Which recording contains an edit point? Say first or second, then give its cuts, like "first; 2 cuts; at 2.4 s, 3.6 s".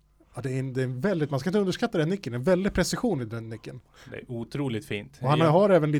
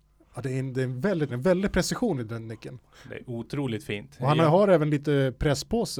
second; 1 cut; at 1.3 s